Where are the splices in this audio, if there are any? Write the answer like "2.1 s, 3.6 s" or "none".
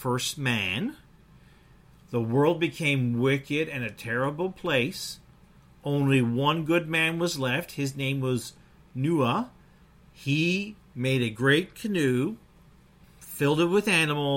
none